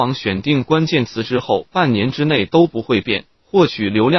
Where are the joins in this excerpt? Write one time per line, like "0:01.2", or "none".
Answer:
none